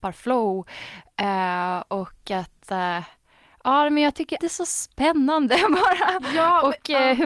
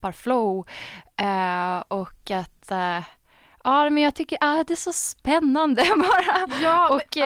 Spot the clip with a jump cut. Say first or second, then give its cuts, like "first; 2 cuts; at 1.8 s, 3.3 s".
first; 1 cut; at 4.4 s